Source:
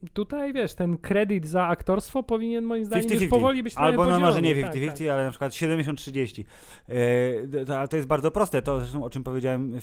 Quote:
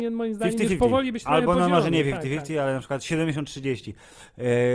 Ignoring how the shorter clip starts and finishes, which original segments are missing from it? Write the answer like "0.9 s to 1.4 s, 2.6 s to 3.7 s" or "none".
none